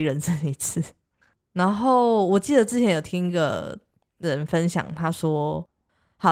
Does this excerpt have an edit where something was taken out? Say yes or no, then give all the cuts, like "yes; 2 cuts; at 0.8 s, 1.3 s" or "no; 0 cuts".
yes; 1 cut; at 1.4 s